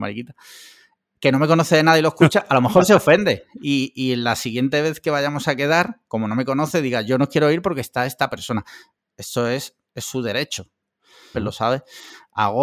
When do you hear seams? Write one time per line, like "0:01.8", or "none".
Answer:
0:11.3